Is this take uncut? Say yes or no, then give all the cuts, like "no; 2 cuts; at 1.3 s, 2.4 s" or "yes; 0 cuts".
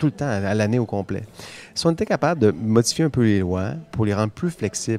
no; 1 cut; at 3.9 s